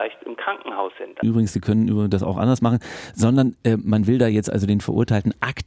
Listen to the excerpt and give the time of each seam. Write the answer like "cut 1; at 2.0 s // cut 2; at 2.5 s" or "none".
cut 1; at 1.2 s